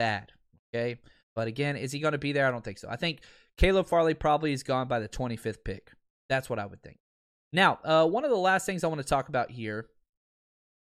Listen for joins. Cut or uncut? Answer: cut